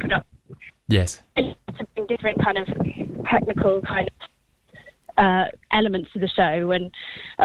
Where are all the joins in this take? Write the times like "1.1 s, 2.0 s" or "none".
none